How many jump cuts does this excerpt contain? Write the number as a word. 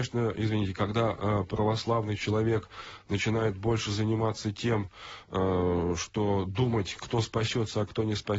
zero